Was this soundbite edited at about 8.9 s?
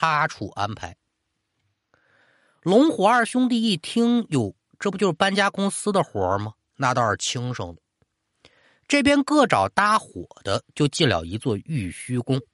no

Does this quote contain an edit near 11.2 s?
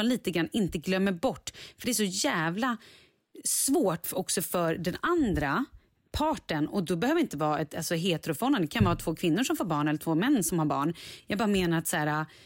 no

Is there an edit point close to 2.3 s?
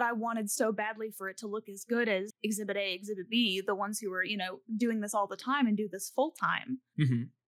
yes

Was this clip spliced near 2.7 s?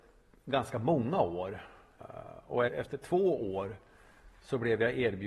yes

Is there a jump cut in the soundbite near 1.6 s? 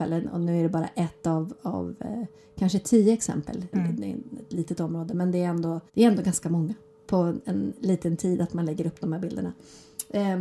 no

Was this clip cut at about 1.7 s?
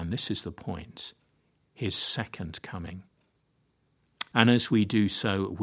no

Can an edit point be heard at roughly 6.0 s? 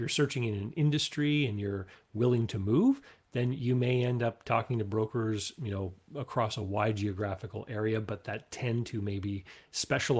no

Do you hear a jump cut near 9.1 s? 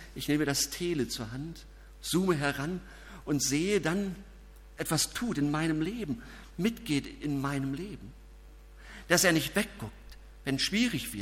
no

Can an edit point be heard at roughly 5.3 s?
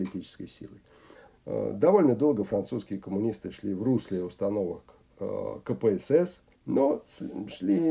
no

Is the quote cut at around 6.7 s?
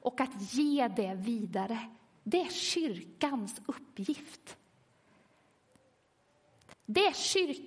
yes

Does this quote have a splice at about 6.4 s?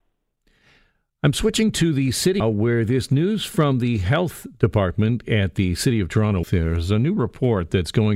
yes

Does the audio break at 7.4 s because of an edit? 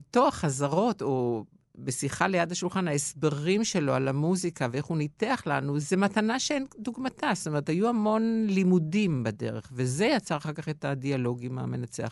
no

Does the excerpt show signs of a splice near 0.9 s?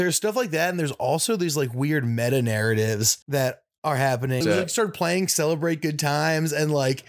no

